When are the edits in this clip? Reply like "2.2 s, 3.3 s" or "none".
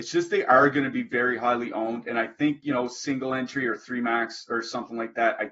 none